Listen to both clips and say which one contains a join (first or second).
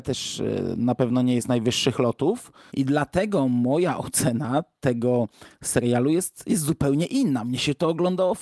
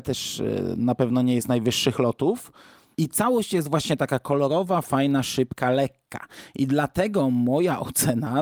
first